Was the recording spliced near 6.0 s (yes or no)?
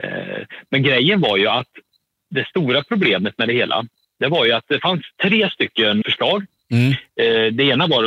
yes